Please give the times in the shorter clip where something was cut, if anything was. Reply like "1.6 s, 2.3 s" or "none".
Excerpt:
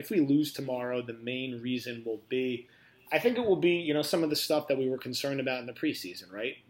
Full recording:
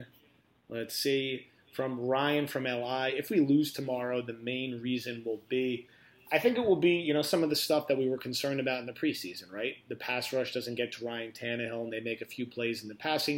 none